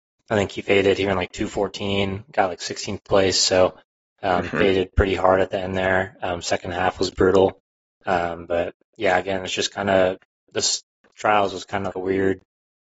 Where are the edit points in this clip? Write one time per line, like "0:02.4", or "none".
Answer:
0:11.9